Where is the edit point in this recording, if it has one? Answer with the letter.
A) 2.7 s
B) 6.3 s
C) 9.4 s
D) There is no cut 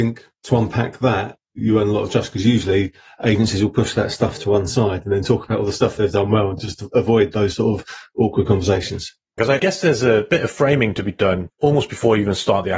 C